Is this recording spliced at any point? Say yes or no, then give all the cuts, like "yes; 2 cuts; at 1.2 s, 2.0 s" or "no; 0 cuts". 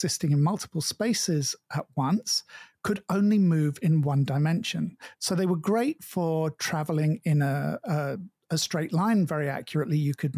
no; 0 cuts